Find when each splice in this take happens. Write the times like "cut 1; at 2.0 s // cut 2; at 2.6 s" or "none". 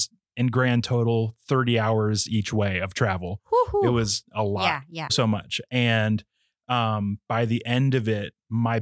cut 1; at 5.1 s